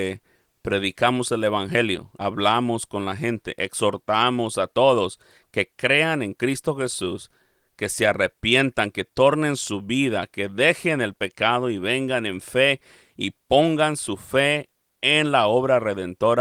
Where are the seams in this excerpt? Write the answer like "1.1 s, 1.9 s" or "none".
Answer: none

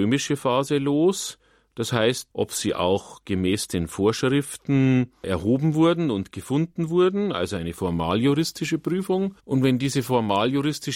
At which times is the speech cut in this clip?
2.3 s, 9.4 s

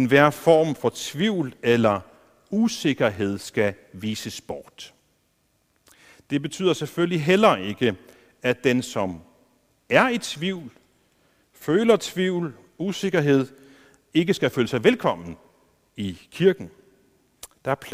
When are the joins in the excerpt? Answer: none

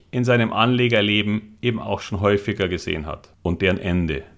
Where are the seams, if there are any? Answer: 3.3 s

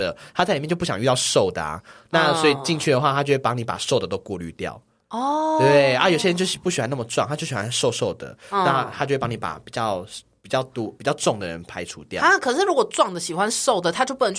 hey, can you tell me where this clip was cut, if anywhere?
none

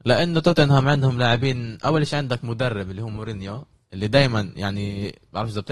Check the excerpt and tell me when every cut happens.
none

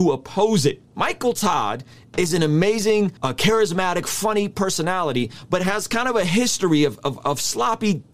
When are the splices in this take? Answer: 3.2 s

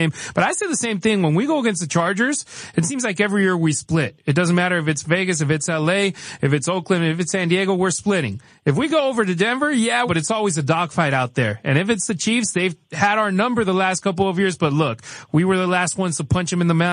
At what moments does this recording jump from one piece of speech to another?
10.1 s

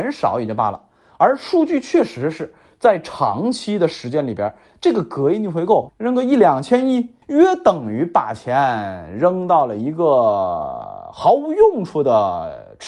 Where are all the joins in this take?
5.9 s, 7.2 s

